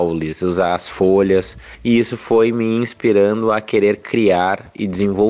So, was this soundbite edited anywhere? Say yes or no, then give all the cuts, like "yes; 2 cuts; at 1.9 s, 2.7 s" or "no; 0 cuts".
no; 0 cuts